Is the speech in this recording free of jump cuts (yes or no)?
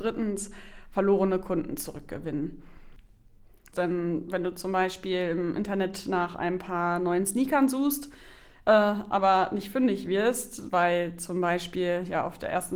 no